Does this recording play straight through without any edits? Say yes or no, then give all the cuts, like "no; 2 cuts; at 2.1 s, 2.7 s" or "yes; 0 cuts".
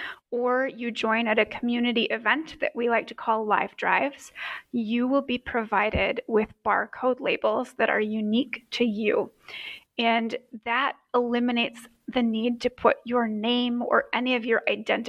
yes; 0 cuts